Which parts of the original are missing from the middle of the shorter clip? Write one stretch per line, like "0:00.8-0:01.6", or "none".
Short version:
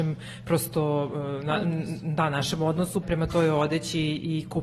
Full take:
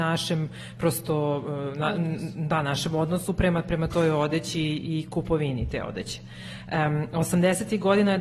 0:03.3-0:03.6

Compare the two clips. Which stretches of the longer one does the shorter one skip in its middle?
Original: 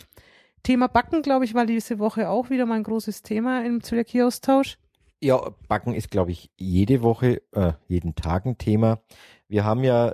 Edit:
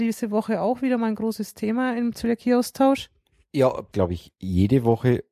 0:05.6-0:06.1

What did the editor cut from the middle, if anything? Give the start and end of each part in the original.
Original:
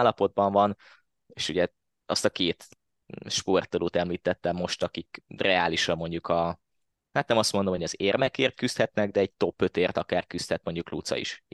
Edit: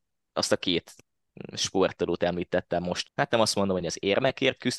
0:04.8-0:07.0

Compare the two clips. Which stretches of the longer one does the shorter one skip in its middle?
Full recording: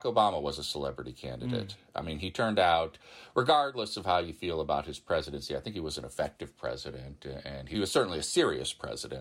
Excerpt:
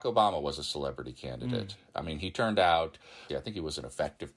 0:03.3-0:05.5

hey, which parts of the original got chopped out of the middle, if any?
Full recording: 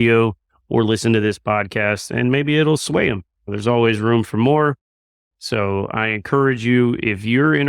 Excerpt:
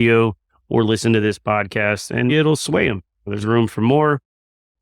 0:02.3-0:02.5
0:03.6-0:04.0

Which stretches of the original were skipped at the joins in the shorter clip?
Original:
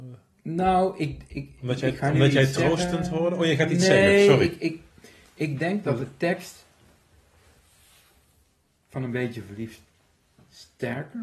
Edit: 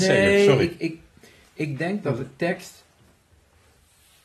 none

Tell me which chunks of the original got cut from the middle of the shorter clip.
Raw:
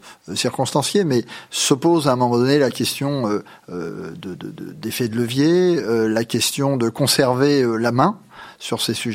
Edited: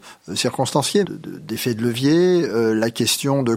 0:01.0-0:04.4

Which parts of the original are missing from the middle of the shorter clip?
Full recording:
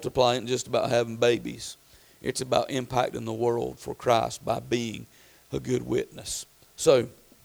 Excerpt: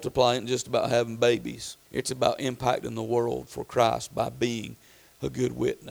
0:01.8-0:02.1

